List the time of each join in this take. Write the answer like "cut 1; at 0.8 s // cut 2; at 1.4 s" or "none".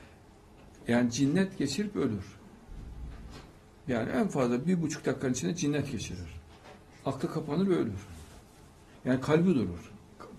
cut 1; at 4.6 s